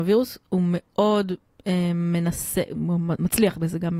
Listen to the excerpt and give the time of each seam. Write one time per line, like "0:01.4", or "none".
0:02.7